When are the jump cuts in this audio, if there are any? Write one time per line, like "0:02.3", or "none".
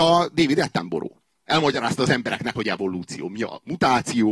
0:01.4
0:02.6